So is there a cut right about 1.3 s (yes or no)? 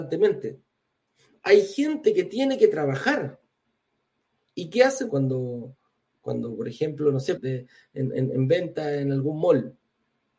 no